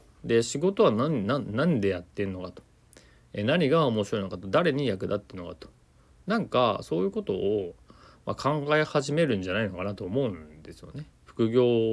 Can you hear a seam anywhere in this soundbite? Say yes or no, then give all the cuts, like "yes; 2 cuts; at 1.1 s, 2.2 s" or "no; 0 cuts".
no; 0 cuts